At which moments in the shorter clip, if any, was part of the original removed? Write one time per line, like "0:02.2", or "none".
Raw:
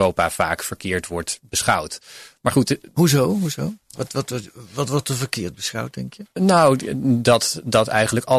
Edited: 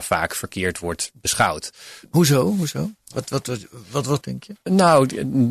0:02.0
0:04.2